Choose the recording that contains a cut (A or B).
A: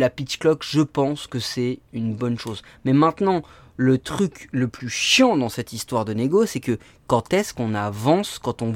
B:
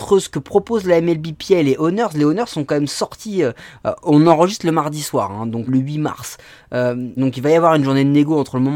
B